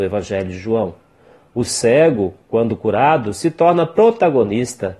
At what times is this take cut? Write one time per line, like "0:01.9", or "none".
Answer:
none